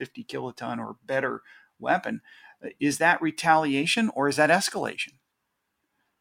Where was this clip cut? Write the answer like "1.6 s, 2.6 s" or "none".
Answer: none